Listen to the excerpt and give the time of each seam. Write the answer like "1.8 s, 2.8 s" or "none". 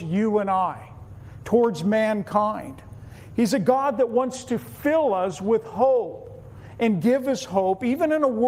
none

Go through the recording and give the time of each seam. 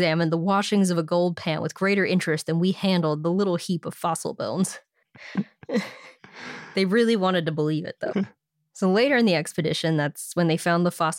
5.0 s, 8.1 s

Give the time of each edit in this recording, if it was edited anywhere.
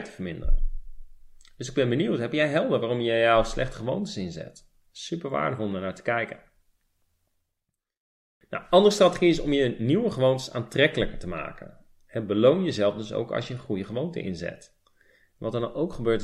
none

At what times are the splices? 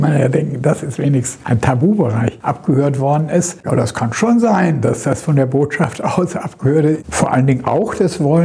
3.6 s, 7.0 s

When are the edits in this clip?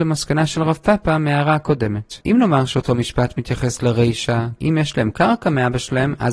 2.2 s, 4.6 s

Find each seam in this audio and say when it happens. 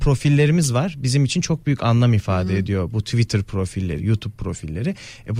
4.0 s

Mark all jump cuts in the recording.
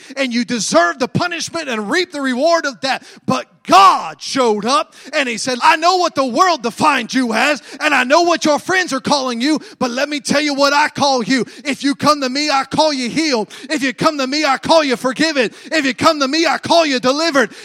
5.6 s

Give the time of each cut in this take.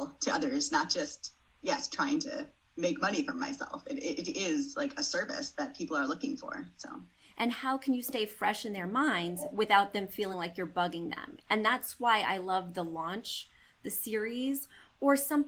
none

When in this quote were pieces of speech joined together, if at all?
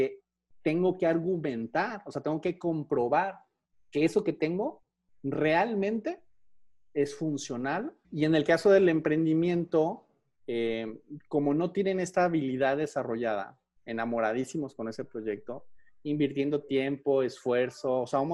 8.0 s, 13.8 s

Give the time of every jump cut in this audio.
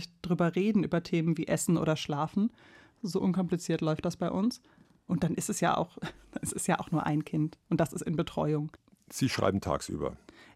none

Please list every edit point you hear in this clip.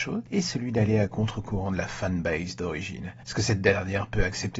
none

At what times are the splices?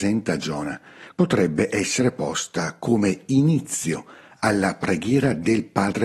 1.1 s

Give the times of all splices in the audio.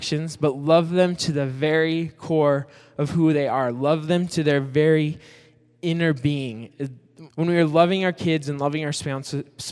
7.3 s

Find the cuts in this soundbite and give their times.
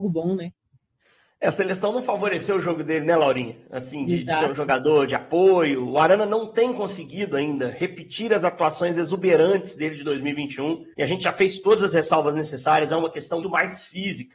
10.9 s, 13.4 s

